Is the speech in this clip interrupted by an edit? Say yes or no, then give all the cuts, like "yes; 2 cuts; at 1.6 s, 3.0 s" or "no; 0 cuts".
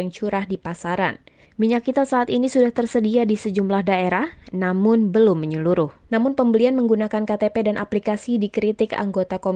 yes; 2 cuts; at 1.4 s, 6.1 s